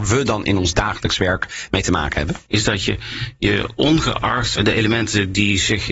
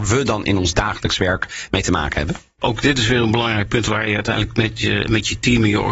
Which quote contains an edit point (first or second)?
first